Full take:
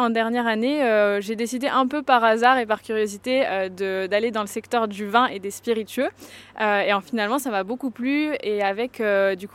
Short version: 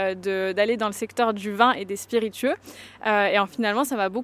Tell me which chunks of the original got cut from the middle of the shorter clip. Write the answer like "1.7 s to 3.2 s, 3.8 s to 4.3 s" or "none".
none